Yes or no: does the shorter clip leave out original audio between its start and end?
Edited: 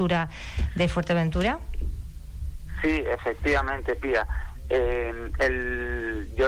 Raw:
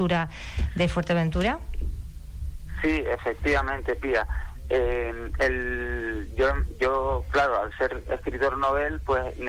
no